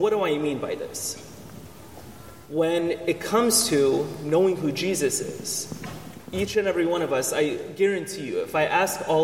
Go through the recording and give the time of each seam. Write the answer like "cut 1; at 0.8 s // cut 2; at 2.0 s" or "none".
none